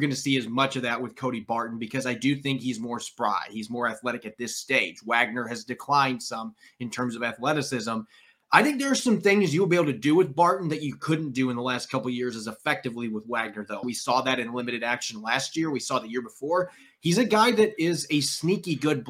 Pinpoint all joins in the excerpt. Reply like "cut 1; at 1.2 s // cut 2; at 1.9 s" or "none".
cut 1; at 13.8 s